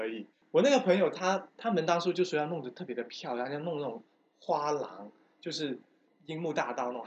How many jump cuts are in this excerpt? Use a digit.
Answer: 0